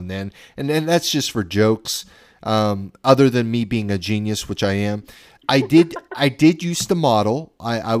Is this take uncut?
no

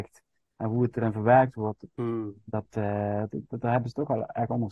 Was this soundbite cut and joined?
yes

